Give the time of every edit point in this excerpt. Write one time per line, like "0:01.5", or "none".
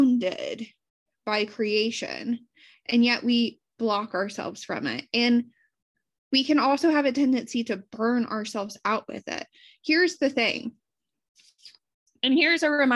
none